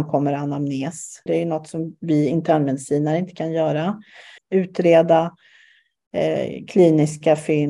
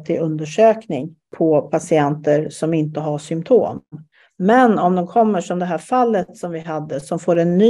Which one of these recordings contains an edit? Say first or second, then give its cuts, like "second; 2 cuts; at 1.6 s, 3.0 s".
first; 2 cuts; at 1.3 s, 4.4 s